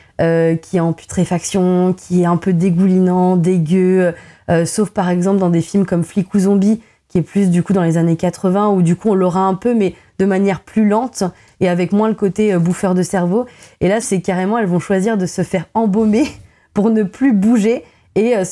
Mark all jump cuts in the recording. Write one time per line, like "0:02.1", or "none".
0:14.0